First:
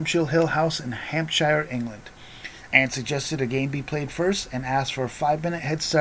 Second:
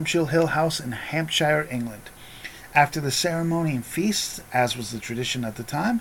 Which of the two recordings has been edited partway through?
first; 1 cut; at 2.7 s

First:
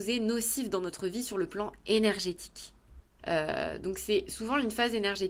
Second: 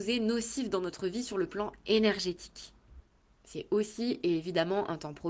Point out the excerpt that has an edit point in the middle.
first; 1 cut; at 3.2 s

